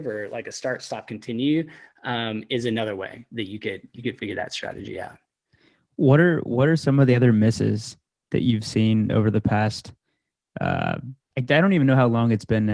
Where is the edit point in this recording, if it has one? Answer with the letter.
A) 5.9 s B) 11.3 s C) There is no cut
B